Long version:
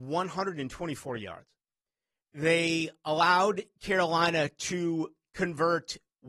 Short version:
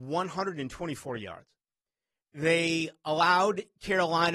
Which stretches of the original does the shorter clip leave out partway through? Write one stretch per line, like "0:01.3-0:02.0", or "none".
none